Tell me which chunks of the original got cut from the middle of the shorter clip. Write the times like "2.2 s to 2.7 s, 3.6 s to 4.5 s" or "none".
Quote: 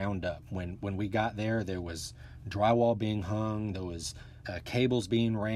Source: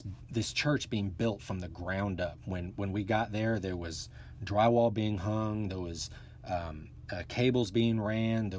6.4 s to 7.1 s